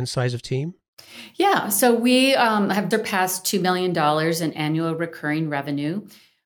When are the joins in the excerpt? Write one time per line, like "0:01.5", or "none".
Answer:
0:02.9